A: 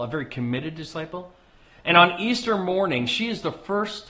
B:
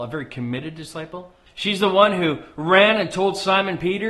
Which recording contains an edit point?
B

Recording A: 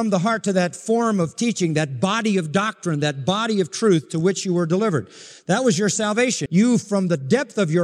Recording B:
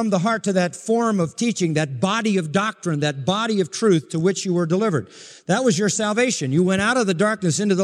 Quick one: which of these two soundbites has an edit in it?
A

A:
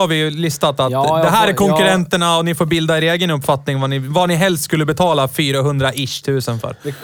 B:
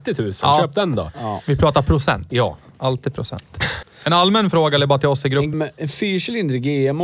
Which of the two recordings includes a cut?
B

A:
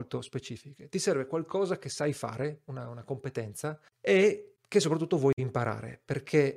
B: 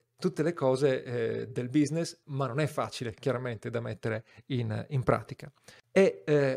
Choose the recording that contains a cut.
B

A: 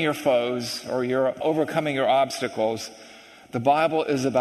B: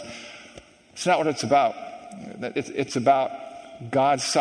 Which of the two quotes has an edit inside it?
A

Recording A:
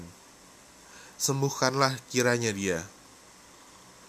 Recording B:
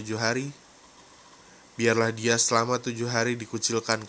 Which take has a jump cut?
A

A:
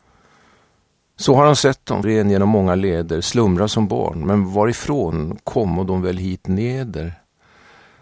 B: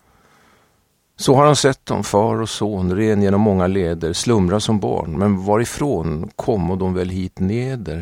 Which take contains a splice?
A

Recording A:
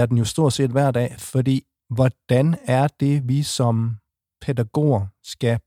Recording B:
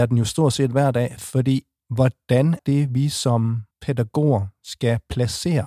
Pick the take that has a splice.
B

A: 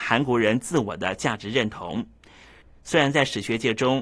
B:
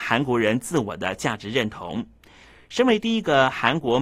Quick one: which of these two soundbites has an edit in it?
A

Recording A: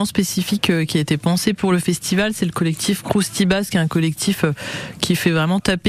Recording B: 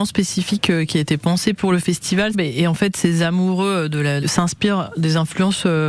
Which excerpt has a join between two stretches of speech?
B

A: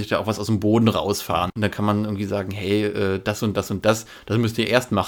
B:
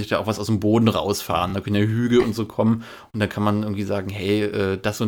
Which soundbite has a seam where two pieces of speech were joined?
A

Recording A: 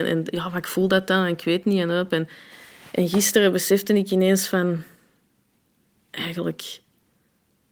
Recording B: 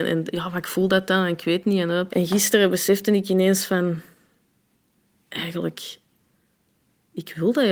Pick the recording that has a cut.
B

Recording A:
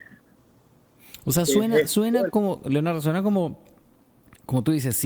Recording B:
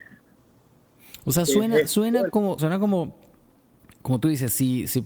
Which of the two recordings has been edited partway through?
B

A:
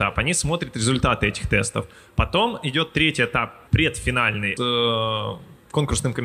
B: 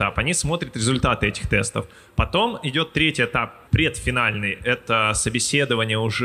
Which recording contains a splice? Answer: A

